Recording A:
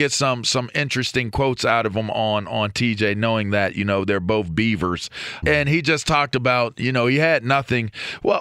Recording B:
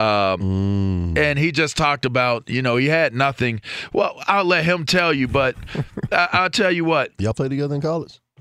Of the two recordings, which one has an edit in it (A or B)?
A